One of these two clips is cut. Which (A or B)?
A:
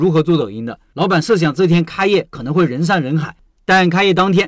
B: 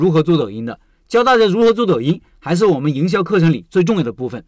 A